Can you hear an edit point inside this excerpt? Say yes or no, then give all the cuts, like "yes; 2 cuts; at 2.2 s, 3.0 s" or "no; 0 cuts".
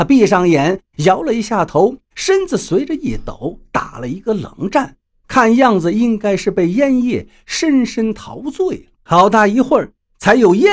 yes; 1 cut; at 8.9 s